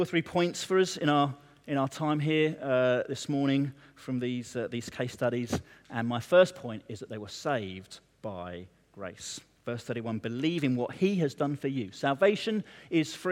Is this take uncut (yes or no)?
yes